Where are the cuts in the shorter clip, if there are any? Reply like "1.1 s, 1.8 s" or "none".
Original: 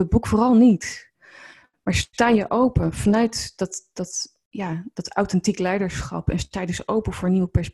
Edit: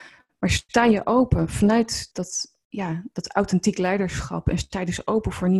2.1 s